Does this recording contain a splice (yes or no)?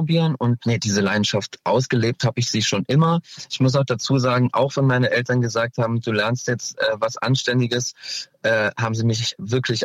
no